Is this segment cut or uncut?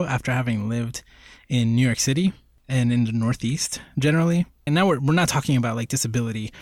cut